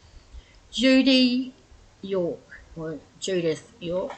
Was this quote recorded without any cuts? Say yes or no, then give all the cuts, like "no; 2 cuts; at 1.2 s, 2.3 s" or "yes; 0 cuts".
yes; 0 cuts